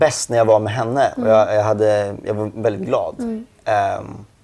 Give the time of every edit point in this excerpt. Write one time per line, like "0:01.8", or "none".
none